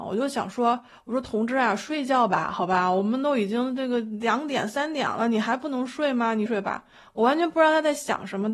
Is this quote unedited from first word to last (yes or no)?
no